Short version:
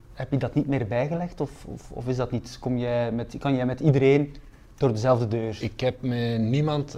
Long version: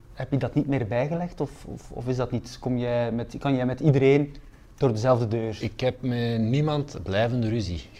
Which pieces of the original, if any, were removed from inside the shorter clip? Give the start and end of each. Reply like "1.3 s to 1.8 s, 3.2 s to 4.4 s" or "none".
none